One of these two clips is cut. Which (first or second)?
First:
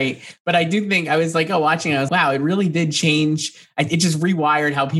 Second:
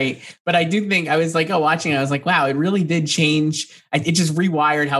first